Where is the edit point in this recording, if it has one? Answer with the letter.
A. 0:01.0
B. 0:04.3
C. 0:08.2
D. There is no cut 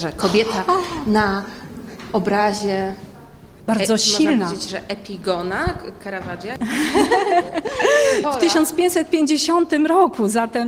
C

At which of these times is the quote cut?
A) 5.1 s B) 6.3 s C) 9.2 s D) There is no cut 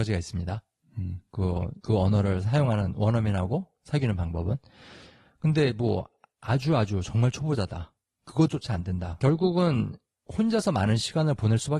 C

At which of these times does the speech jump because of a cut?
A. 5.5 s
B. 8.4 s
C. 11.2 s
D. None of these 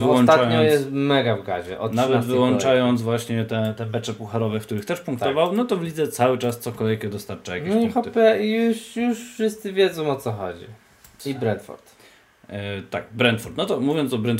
C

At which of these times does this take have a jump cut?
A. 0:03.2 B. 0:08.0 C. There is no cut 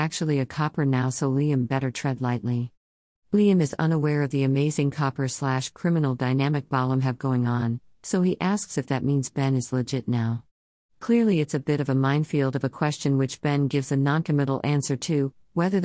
A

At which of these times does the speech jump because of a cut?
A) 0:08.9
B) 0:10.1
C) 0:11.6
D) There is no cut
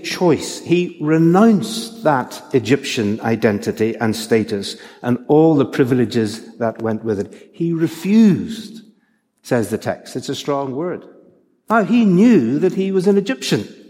D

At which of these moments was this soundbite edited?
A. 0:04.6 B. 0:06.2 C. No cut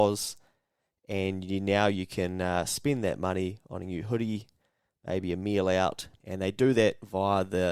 B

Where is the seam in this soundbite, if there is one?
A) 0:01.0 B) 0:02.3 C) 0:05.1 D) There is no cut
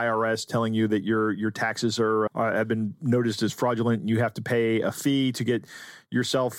B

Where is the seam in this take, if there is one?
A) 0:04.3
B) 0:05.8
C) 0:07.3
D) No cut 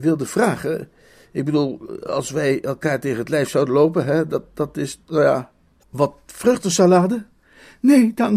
B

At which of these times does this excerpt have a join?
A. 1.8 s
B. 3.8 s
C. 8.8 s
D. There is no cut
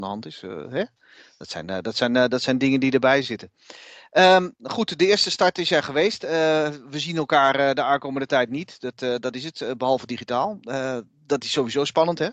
D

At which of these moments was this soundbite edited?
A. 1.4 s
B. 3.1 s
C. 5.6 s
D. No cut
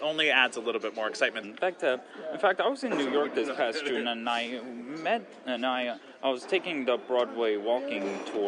A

